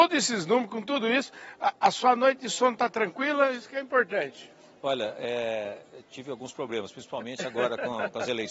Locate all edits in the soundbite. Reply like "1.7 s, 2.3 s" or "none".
none